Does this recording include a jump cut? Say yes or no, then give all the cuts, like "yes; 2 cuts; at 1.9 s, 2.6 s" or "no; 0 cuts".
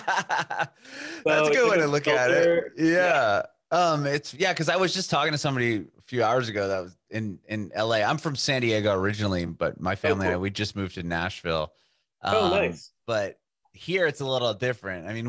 no; 0 cuts